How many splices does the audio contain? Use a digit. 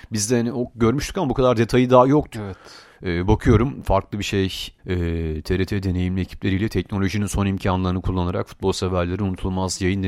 2